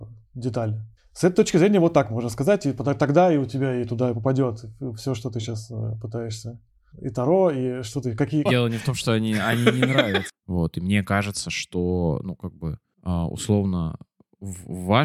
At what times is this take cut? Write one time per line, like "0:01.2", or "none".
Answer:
0:08.5
0:10.3